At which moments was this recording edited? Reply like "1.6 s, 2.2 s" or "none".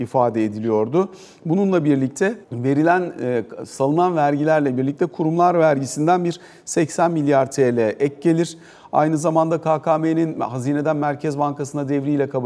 2.4 s